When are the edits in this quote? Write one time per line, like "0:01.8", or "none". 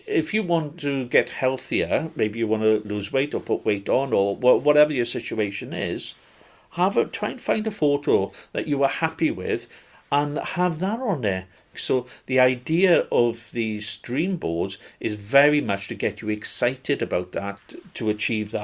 0:11.7
0:17.6